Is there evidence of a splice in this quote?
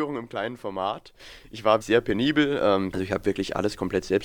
yes; 2 cuts; at 1.8 s, 2.9 s

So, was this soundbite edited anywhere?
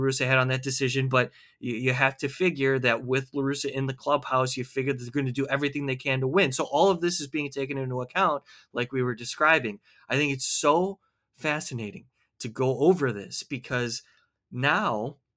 no; 0 cuts

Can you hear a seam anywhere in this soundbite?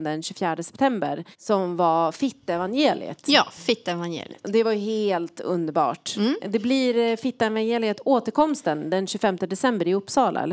yes; 1 cut; at 1.3 s

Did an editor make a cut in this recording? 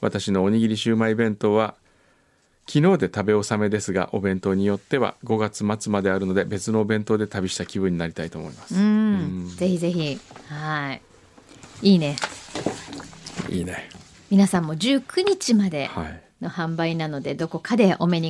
no; 0 cuts

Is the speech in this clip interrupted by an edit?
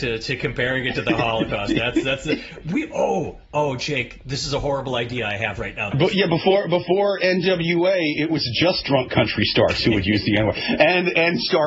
yes; 1 cut; at 5.9 s

